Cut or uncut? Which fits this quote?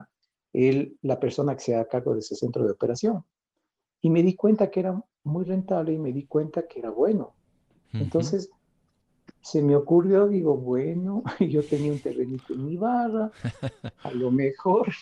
uncut